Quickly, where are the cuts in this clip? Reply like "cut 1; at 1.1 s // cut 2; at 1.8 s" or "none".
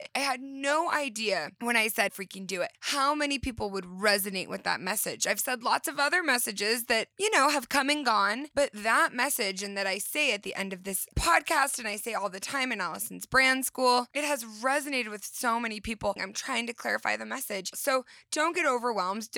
cut 1; at 2.1 s // cut 2; at 16.2 s // cut 3; at 17.7 s